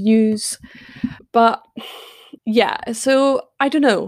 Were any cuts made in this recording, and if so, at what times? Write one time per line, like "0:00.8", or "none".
0:01.2
0:02.4